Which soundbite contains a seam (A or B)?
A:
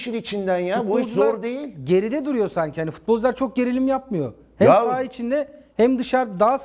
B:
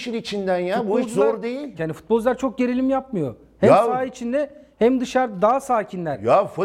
B